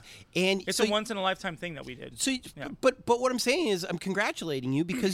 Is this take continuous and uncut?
yes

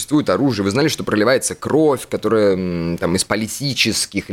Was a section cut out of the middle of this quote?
no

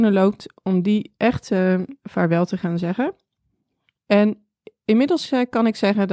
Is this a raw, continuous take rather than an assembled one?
no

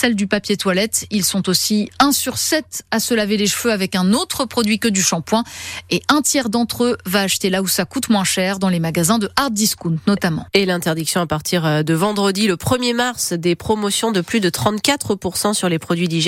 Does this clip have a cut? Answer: no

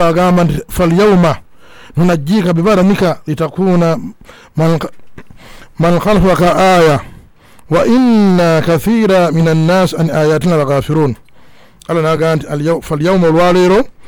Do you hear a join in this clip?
no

